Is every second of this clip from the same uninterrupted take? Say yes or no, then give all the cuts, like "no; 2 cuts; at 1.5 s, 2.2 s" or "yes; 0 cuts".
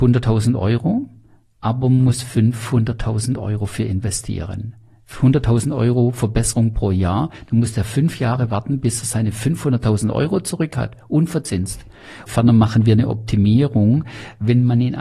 no; 1 cut; at 12.3 s